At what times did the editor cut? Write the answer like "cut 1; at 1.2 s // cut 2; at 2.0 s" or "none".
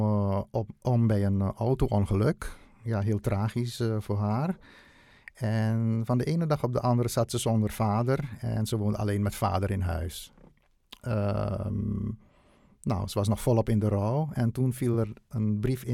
none

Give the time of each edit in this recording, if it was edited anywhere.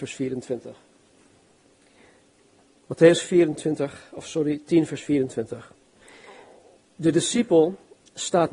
none

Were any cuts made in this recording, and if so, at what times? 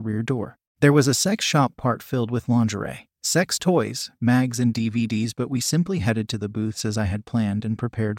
cut 1; at 3.1 s

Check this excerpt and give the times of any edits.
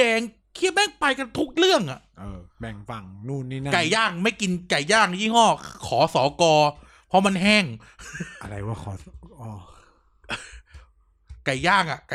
none

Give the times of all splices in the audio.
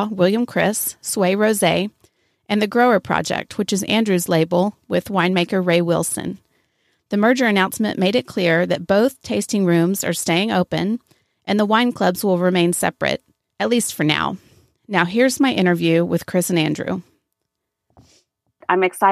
none

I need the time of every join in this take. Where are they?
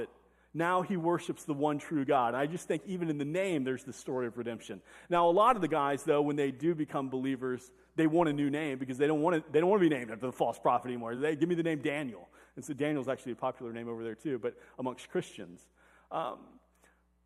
none

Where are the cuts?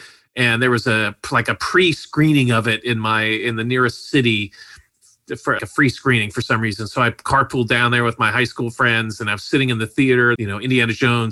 cut 1; at 5.6 s // cut 2; at 10.4 s

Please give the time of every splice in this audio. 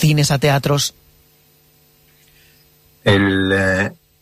none

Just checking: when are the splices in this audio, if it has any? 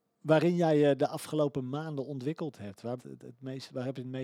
cut 1; at 3.0 s

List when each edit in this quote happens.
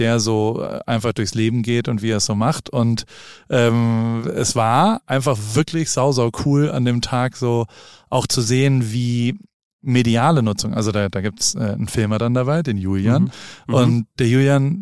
none

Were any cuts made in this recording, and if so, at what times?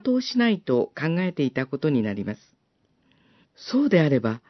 cut 1; at 3.4 s

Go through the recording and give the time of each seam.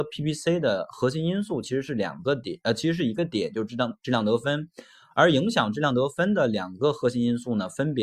none

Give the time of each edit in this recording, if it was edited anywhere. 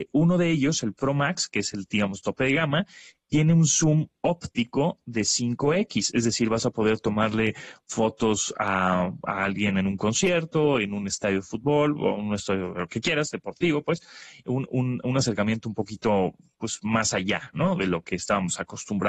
none

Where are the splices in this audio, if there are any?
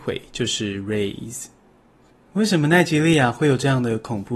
none

